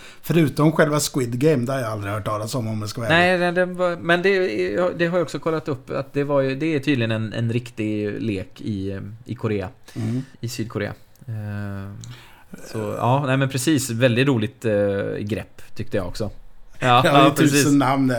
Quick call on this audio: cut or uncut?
cut